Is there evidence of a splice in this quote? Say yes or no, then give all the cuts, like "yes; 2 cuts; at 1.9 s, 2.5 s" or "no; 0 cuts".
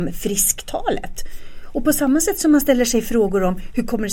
no; 0 cuts